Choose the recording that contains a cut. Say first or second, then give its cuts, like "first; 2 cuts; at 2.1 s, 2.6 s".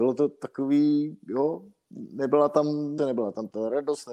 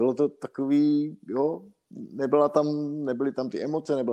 first; 1 cut; at 3.0 s